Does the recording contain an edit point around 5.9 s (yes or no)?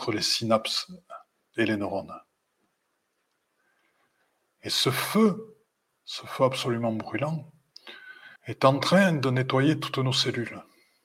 yes